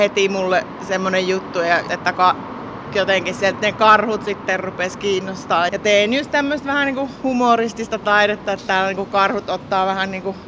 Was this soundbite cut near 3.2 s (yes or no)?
no